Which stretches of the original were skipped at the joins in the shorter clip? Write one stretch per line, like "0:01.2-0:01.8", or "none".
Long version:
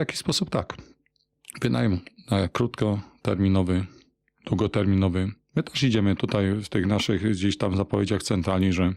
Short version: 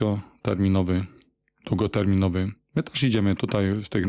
none